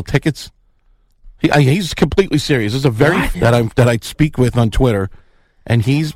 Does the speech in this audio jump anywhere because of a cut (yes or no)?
yes